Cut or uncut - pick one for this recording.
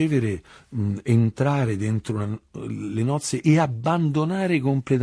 uncut